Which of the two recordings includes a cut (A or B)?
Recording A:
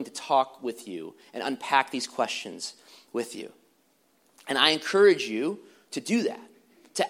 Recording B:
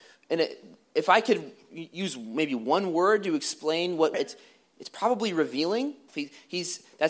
B